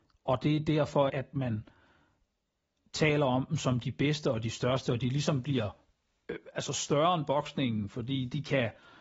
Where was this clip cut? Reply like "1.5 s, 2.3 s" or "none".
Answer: 1.1 s